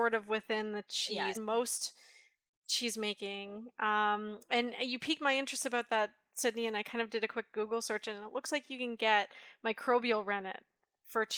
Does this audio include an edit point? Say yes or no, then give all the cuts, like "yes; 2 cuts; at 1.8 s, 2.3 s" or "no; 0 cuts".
yes; 1 cut; at 1.4 s